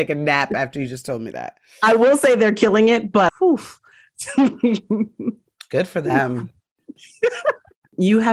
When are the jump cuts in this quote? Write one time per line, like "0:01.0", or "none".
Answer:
0:03.3
0:07.0

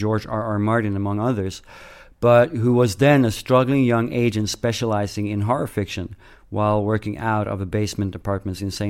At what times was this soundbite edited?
none

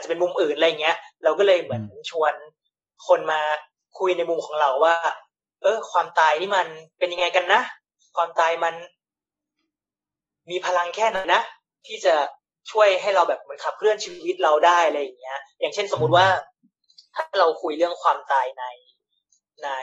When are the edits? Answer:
0:11.2

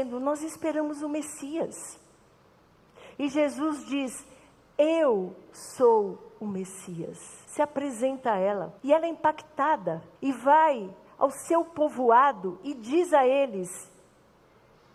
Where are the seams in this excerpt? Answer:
0:07.4
0:08.8
0:10.1

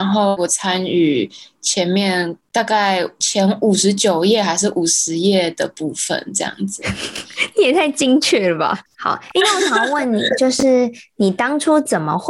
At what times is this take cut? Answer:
none

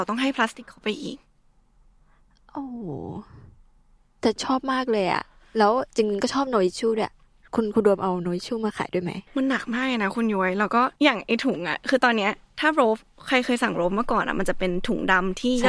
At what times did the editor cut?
0:09.3
0:11.0

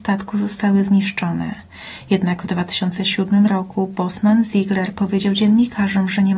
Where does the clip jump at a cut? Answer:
none

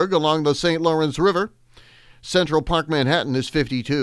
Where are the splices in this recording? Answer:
none

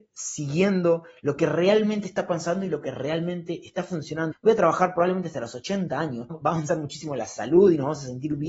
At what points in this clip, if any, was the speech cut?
0:04.3
0:06.3

